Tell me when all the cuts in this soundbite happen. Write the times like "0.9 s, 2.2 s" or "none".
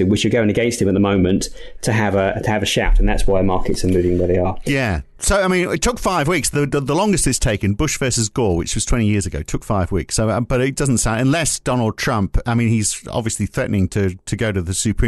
none